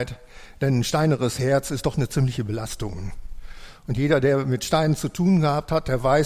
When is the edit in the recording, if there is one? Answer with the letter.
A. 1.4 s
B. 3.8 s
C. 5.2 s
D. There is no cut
D